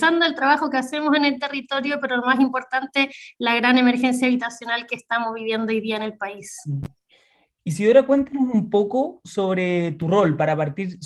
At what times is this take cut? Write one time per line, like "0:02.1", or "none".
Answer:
none